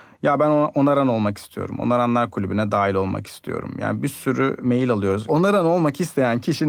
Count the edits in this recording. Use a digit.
1